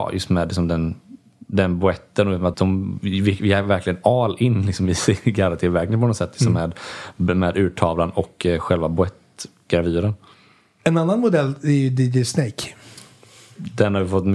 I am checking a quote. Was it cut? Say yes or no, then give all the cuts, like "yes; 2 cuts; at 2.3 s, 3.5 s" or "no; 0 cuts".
yes; 1 cut; at 2.5 s